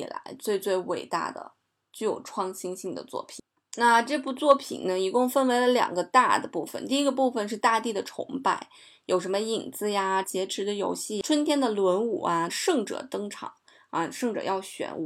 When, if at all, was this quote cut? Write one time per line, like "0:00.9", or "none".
0:10.2
0:12.5